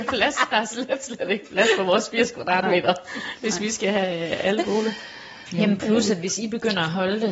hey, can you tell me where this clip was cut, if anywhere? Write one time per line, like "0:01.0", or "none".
0:05.5

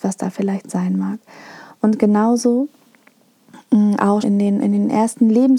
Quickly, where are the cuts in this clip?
0:01.7
0:04.2

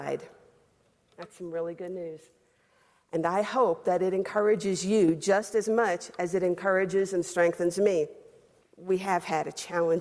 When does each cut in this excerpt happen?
0:08.6

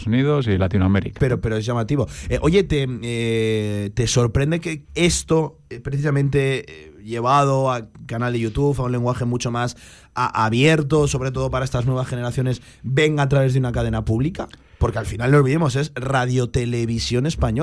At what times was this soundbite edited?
0:01.2
0:04.8

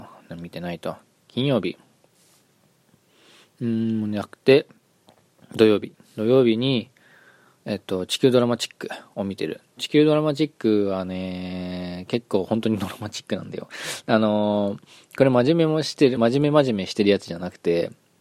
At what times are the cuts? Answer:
none

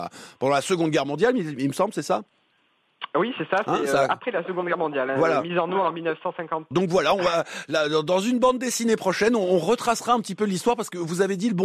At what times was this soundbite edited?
0:06.7

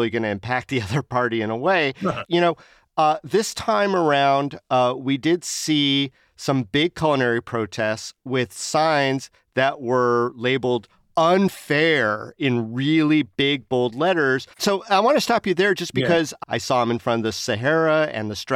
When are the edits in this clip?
0:02.2
0:14.5
0:16.4

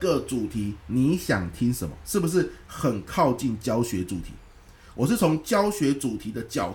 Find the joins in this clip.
none

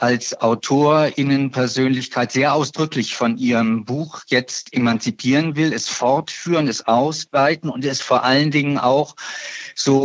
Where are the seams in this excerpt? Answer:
none

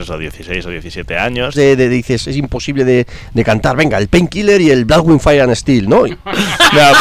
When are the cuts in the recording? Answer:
0:01.5
0:06.1

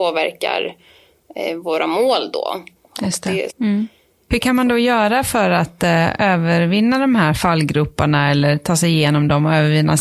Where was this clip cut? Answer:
0:03.5

